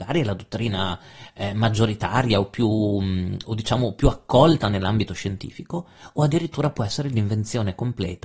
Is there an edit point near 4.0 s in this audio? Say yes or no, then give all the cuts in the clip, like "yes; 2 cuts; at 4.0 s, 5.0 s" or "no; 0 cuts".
no; 0 cuts